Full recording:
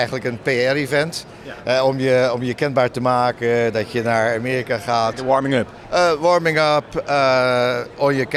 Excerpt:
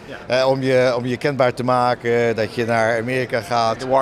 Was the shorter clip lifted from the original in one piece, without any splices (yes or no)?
yes